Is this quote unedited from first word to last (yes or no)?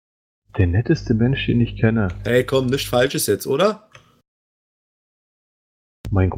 yes